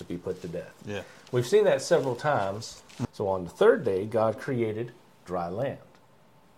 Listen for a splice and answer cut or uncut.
cut